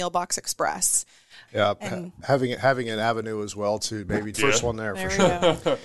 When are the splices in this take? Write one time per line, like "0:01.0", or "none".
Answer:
0:01.5
0:04.3